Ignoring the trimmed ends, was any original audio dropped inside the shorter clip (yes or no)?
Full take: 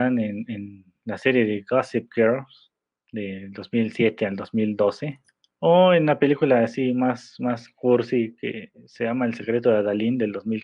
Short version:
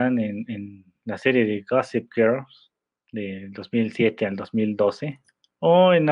no